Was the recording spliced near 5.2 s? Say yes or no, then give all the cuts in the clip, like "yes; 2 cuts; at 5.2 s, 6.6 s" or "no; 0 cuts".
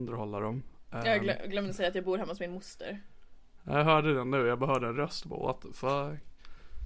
no; 0 cuts